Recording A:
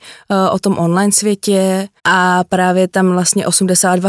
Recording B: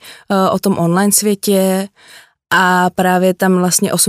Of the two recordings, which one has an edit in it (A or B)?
A